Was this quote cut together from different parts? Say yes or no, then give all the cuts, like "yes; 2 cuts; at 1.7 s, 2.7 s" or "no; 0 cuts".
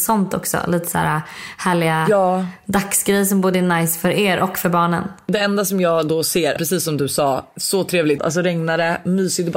yes; 2 cuts; at 6.6 s, 8.2 s